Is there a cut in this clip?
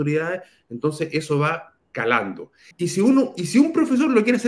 yes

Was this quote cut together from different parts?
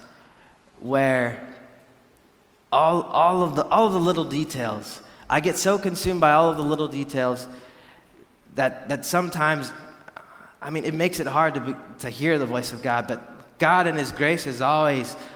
no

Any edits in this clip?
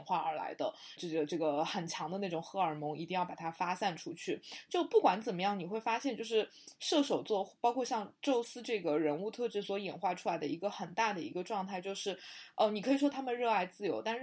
yes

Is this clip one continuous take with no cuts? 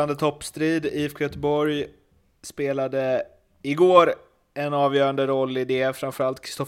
yes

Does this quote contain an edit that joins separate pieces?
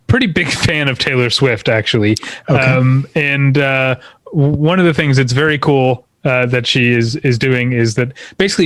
no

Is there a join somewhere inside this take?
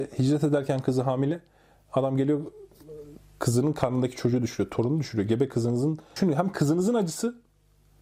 no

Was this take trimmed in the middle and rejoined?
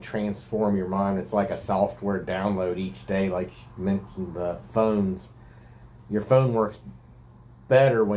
no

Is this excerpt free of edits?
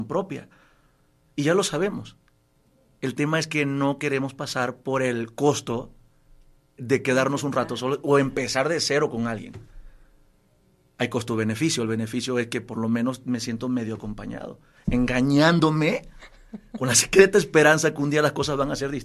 no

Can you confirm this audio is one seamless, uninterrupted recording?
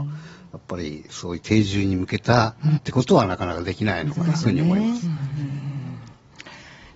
no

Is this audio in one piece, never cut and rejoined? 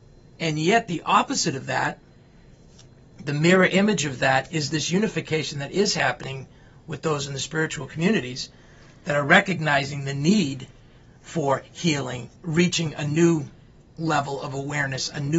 no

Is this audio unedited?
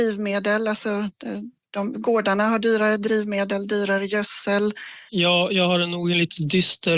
no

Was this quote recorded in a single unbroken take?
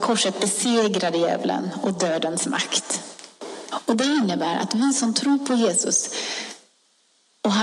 no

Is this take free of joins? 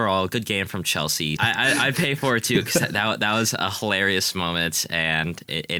no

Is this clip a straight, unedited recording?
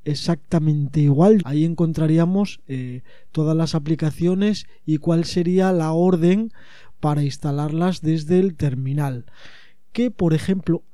no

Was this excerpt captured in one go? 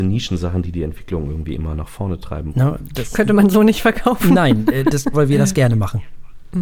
no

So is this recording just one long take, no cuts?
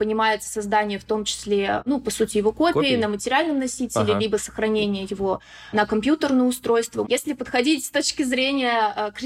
no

